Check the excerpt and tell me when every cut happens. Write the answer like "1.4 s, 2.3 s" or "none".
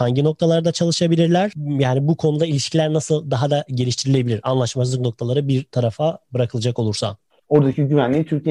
7.4 s